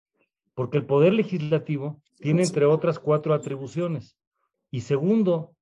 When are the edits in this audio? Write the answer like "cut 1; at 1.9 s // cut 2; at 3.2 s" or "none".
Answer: cut 1; at 2.1 s // cut 2; at 4.5 s